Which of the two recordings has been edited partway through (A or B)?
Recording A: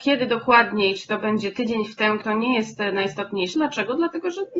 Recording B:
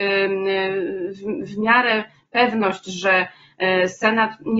A